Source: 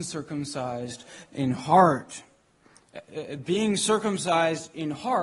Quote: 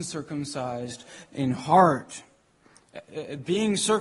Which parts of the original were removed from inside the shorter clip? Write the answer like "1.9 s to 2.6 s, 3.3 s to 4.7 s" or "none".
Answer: none